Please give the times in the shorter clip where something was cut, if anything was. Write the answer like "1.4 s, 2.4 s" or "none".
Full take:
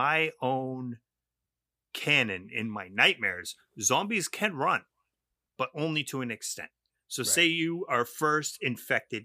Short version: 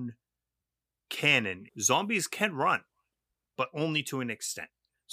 1.7 s